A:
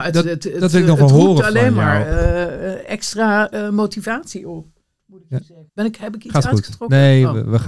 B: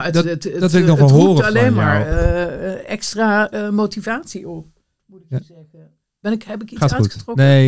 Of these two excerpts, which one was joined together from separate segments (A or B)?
A